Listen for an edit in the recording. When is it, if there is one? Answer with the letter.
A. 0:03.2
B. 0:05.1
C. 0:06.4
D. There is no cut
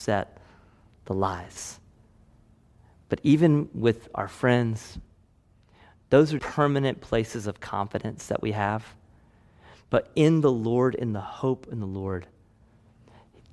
C